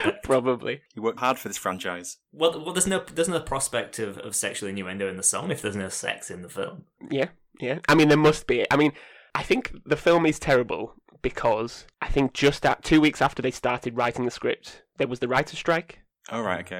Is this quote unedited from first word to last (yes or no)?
no